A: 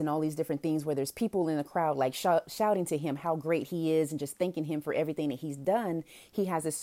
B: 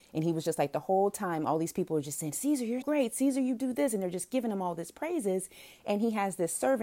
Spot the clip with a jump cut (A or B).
B